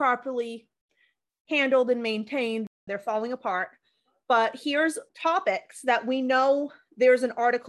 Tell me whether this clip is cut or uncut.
cut